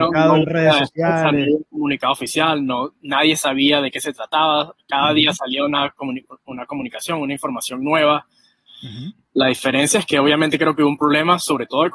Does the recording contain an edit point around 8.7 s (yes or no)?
yes